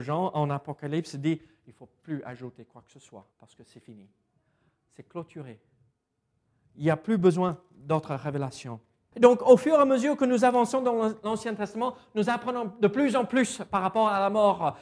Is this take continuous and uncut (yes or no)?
no